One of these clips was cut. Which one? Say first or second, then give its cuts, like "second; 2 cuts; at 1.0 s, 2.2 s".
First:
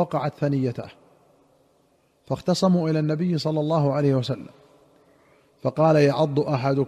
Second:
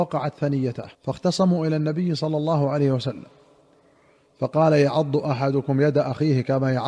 second; 1 cut; at 0.9 s